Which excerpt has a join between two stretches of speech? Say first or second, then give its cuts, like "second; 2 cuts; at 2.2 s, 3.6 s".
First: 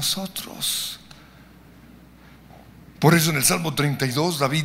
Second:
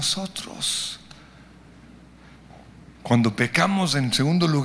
second; 1 cut; at 3.0 s